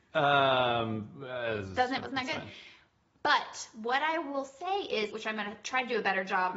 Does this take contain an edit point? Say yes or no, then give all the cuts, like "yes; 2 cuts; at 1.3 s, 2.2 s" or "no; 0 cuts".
yes; 2 cuts; at 2.0 s, 5.1 s